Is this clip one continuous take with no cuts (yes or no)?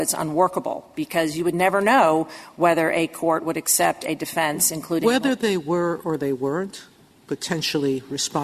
yes